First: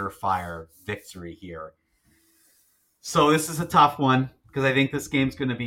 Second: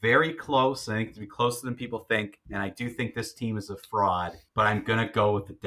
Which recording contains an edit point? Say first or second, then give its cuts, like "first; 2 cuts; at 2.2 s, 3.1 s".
second; 1 cut; at 4.5 s